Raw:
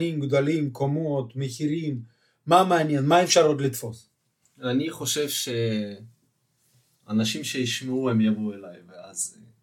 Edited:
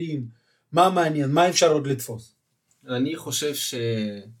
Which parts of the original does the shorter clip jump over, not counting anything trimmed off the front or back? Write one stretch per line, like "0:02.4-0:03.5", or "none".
none